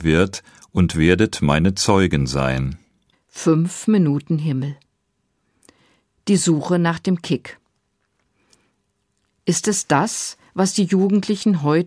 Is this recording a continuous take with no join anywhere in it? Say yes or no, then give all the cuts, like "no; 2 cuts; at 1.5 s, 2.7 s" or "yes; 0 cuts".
no; 1 cut; at 3.1 s